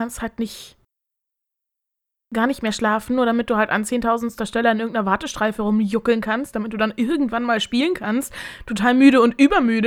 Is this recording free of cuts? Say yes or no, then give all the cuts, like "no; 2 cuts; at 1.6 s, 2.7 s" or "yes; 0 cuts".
yes; 0 cuts